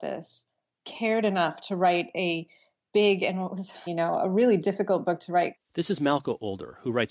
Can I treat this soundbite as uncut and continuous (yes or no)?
no